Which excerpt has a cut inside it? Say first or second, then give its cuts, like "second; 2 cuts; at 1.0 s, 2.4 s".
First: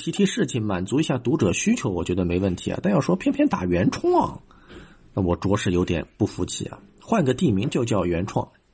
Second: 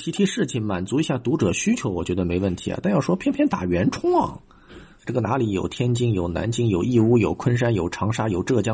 second; 1 cut; at 5.0 s